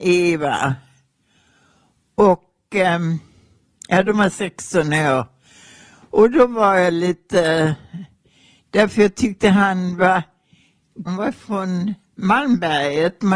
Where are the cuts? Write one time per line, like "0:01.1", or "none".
0:11.1